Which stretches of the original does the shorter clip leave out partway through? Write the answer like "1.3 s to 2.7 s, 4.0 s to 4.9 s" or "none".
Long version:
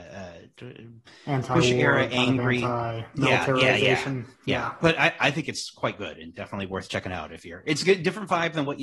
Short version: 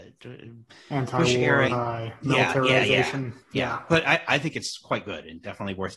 2.0 s to 2.6 s